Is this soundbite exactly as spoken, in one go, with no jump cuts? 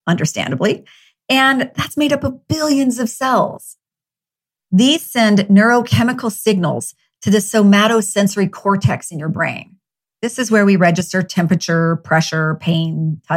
yes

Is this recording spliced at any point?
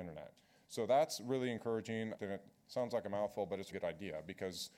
yes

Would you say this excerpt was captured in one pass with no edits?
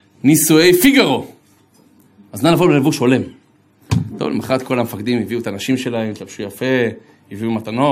yes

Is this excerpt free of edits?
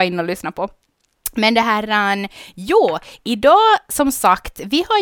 yes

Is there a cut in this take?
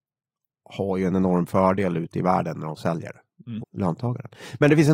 yes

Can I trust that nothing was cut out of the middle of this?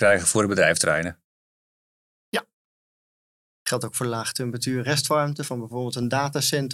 no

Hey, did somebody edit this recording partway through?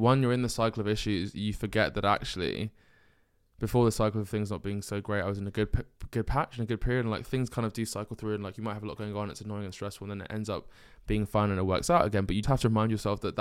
yes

